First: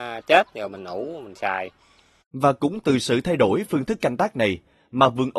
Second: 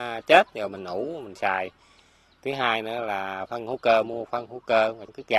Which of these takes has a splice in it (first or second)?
first